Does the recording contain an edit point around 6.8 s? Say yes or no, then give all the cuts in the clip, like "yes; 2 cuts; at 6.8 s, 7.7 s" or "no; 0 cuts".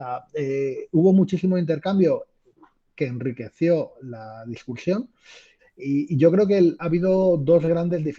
yes; 2 cuts; at 5.6 s, 6.8 s